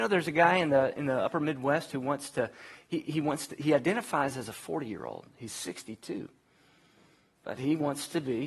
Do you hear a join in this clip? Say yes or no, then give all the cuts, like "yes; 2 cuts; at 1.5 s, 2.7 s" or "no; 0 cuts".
no; 0 cuts